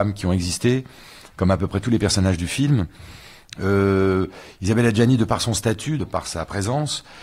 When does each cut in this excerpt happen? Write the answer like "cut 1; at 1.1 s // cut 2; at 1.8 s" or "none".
cut 1; at 6.0 s